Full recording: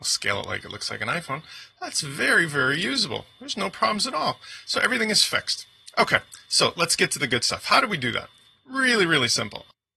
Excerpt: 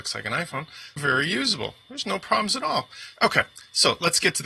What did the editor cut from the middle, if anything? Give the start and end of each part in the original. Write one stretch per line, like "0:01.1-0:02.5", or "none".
0:01.7-0:02.5
0:04.7-0:05.9